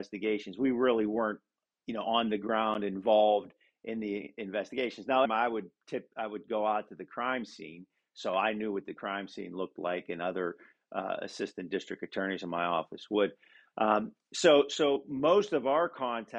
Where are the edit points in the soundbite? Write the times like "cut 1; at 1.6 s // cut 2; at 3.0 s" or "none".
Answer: cut 1; at 5.2 s